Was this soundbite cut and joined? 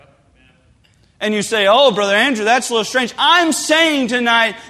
no; 0 cuts

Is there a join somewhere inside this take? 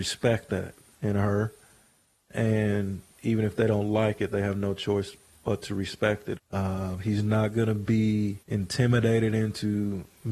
yes; 2 cuts; at 6.4 s, 8.4 s

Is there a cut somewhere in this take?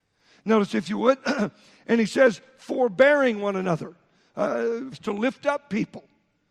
yes; 1 cut; at 4.9 s

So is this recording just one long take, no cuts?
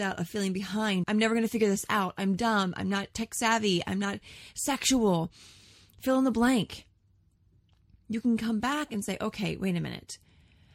no; 1 cut; at 1.0 s

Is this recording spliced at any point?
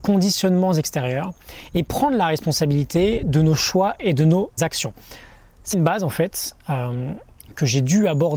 yes; 2 cuts; at 4.6 s, 5.7 s

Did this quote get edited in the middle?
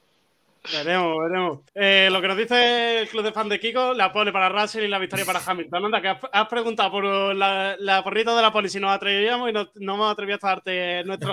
yes; 1 cut; at 1.7 s

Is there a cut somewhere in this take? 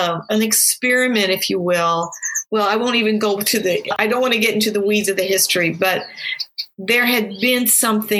yes; 1 cut; at 2.5 s

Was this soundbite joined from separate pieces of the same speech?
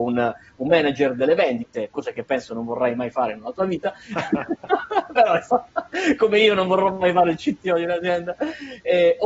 no; 0 cuts

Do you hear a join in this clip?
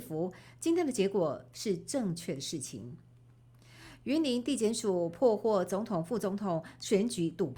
no; 0 cuts

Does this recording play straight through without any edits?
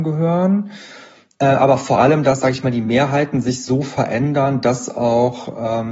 yes; 0 cuts

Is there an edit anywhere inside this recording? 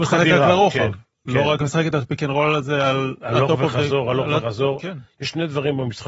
no; 0 cuts

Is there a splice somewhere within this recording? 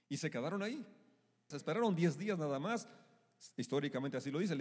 yes; 1 cut; at 1.5 s

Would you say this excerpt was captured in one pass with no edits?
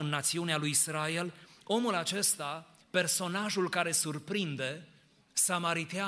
yes; 0 cuts

